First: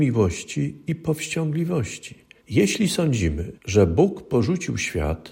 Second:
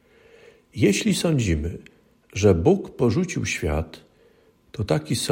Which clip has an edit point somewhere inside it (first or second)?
first